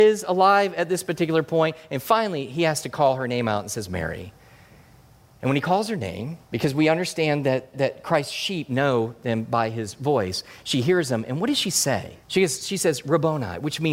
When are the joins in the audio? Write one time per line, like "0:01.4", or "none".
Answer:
0:06.4
0:07.7
0:12.2